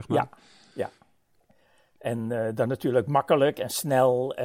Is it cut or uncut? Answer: uncut